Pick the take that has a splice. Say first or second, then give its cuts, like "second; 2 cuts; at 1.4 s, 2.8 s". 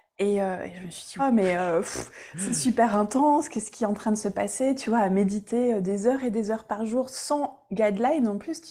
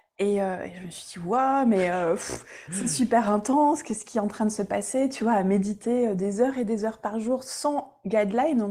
first; 1 cut; at 1.2 s